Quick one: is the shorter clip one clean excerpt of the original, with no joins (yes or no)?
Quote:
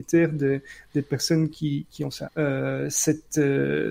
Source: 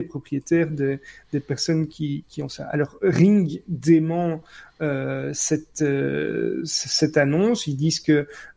no